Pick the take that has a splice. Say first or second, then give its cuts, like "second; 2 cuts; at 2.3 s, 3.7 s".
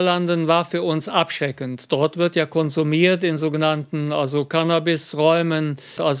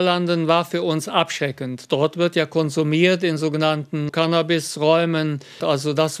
second; 1 cut; at 4.1 s